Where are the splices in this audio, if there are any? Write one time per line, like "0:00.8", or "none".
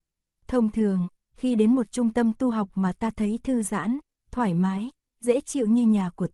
none